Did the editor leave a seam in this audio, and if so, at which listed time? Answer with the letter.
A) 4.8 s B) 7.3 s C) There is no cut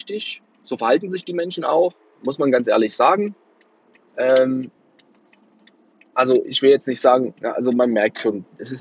C